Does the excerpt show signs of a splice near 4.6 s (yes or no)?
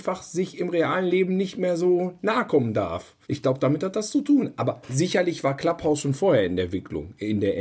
no